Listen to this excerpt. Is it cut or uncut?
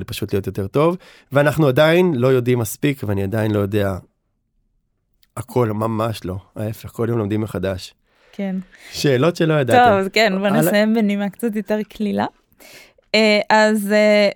uncut